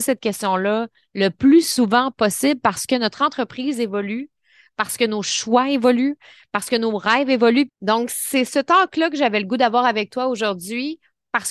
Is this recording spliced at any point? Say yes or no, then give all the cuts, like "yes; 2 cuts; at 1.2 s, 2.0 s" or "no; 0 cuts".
yes; 1 cut; at 7.7 s